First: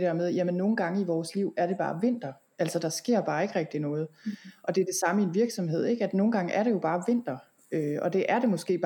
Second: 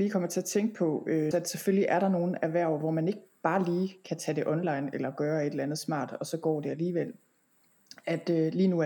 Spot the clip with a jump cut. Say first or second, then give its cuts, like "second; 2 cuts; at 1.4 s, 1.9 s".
second; 1 cut; at 1.3 s